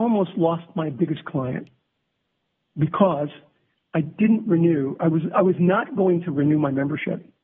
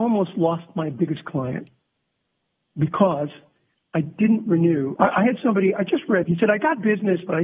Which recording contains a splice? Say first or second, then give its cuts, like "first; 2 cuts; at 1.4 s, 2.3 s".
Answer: second; 2 cuts; at 5.0 s, 6.2 s